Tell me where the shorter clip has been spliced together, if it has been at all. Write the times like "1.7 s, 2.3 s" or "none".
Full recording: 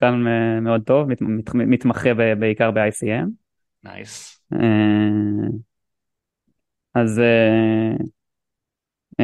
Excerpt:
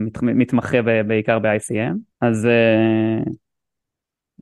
2.1 s

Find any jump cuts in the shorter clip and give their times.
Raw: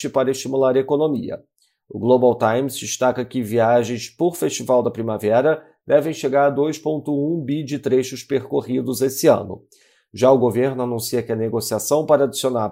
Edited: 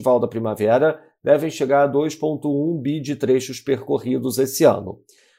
none

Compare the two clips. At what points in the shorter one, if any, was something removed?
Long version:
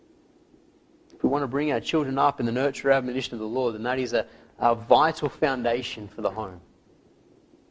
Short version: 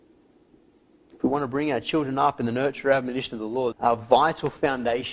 3.7 s

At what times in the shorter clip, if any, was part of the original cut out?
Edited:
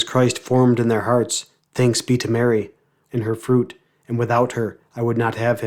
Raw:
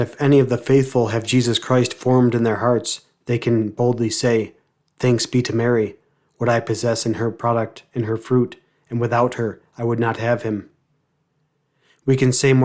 1.6 s, 3.1 s

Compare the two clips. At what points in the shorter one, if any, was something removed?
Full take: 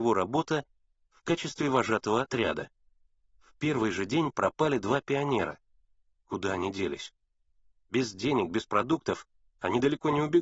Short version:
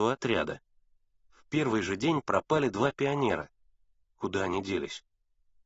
none

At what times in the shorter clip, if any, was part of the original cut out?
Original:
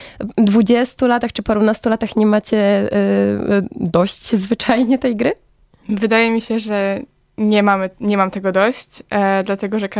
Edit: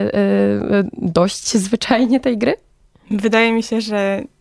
none

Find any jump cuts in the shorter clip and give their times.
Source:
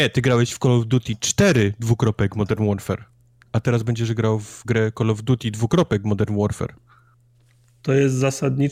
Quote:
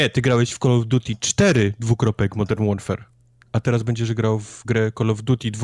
none

